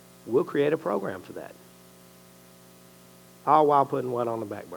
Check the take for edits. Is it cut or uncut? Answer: uncut